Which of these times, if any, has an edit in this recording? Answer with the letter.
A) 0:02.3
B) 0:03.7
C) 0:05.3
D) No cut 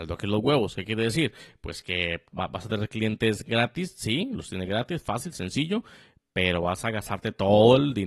A